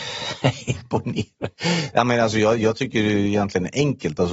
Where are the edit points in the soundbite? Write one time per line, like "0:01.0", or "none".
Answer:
none

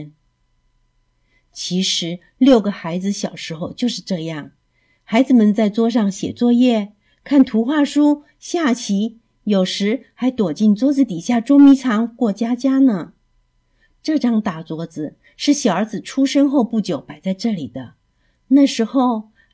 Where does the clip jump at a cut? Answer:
none

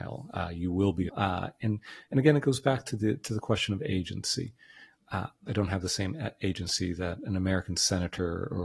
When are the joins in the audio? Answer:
0:01.1
0:05.5

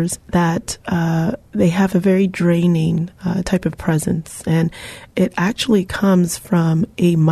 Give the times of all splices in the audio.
0:01.4

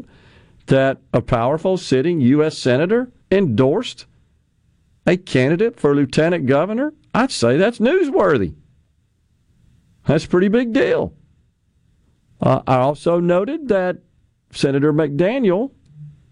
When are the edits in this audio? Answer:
0:03.2

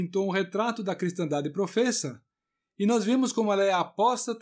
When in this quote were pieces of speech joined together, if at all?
none

